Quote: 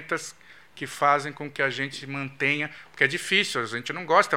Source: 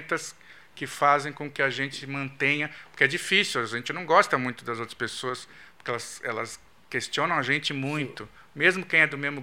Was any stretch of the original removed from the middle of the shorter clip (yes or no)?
no